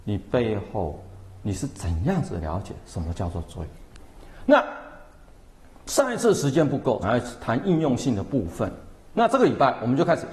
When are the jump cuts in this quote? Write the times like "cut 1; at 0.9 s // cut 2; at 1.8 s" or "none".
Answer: cut 1; at 7.0 s